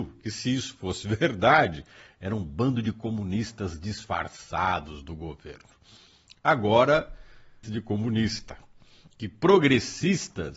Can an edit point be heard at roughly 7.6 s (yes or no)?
yes